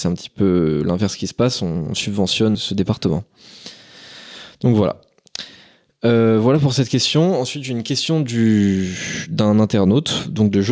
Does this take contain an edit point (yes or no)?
yes